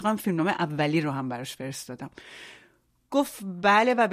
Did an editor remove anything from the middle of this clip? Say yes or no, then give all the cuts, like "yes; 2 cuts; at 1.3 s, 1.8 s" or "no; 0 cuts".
no; 0 cuts